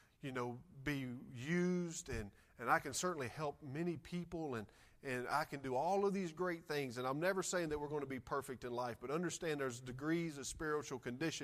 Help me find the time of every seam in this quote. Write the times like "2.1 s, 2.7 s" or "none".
none